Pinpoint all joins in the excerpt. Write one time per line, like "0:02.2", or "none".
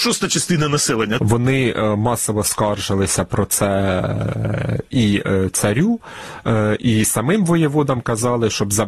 0:01.2